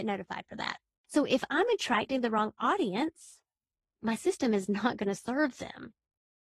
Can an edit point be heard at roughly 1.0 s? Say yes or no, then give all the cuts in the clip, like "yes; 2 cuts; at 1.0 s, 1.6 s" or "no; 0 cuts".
yes; 1 cut; at 1.0 s